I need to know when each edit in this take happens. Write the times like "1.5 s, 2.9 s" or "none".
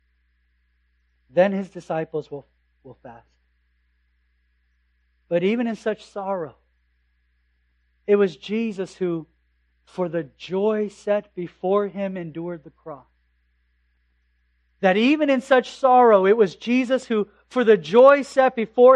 none

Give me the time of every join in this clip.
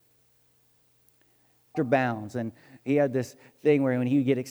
1.7 s

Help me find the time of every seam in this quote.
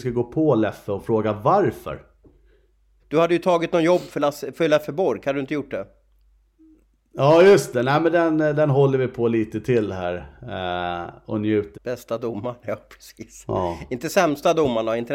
3.0 s, 11.7 s

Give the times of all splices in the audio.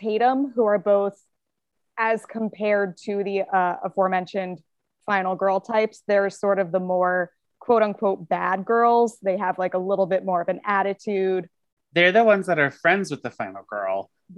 11.8 s

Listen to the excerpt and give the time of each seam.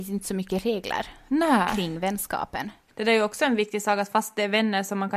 2.9 s

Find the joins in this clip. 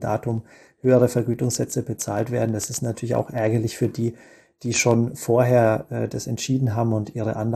none

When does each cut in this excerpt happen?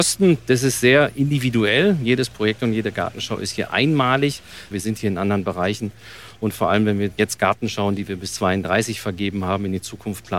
4.7 s

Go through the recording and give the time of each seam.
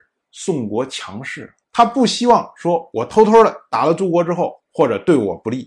1.6 s, 4.6 s

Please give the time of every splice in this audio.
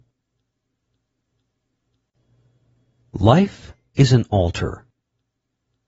none

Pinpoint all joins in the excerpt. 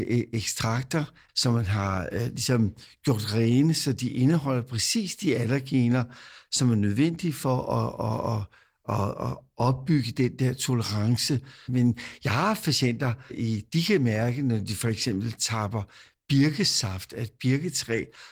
11.6 s, 13.3 s

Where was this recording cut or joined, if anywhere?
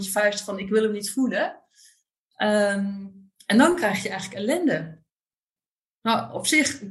none

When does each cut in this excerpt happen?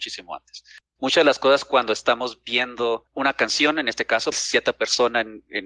1.0 s, 4.3 s

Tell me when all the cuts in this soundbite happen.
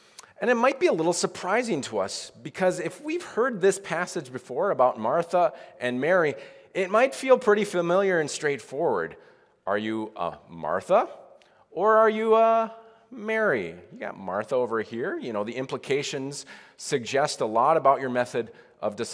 none

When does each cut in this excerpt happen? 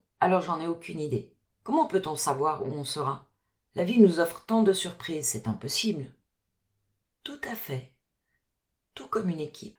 1.5 s, 7.0 s

